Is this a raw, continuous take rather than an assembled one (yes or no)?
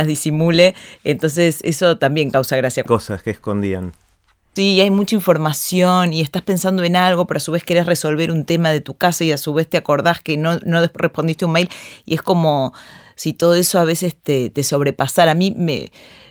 no